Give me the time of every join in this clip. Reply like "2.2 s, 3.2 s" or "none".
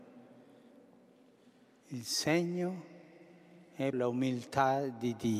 3.9 s